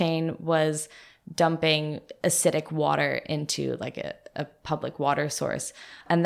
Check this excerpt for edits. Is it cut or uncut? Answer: uncut